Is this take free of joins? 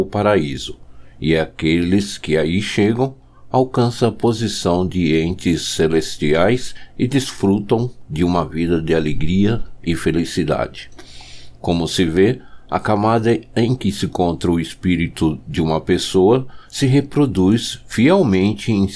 yes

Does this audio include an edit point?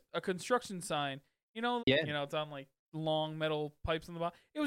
yes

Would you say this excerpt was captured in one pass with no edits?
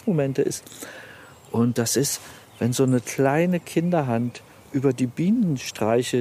yes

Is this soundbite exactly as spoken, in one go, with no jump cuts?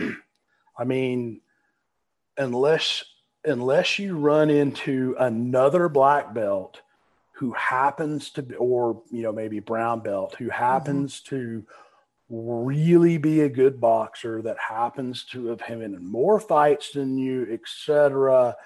yes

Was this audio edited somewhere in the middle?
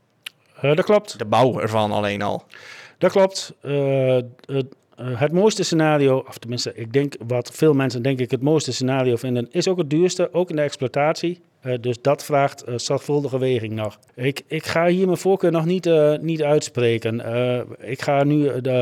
yes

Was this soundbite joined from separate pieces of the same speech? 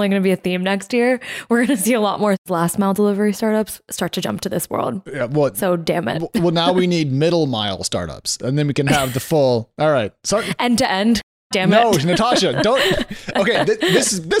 no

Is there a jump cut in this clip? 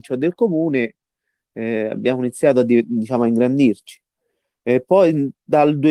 no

